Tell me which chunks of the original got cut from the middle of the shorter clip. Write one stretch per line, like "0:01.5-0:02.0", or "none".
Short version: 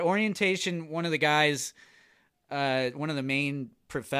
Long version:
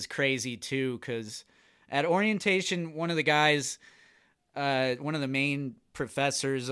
none